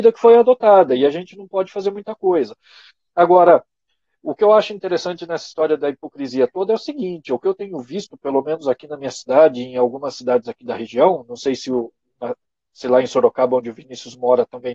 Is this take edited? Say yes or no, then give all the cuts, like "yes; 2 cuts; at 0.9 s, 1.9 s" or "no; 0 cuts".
no; 0 cuts